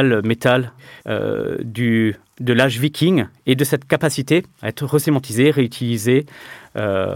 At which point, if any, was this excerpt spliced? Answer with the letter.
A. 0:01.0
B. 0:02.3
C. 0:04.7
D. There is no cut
A